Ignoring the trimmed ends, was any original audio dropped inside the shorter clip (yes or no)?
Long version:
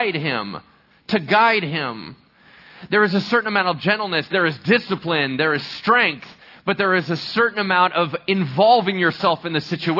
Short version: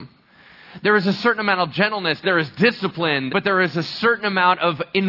yes